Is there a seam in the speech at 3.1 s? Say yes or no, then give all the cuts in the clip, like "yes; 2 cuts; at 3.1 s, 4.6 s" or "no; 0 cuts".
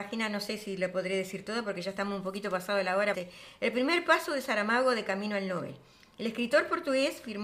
yes; 1 cut; at 3.1 s